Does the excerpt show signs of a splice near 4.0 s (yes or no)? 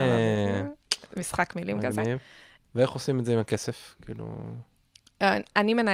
no